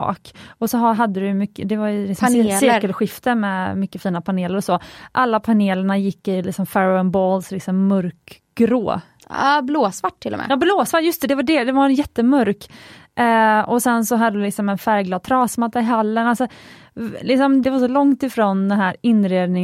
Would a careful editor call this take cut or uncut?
cut